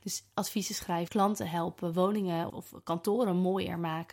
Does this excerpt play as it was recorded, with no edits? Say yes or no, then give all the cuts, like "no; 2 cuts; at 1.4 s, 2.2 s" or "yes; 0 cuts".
no; 2 cuts; at 1.1 s, 2.5 s